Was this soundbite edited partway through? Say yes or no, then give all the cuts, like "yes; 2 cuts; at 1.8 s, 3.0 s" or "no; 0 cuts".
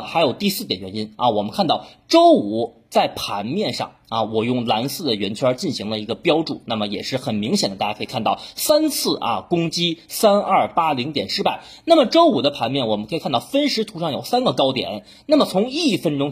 no; 0 cuts